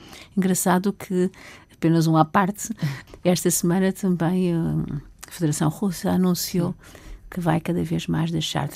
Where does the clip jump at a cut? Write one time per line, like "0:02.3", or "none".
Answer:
none